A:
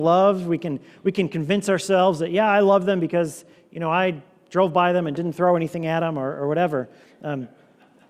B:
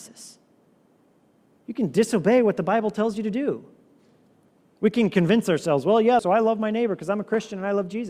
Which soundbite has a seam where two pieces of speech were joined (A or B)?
B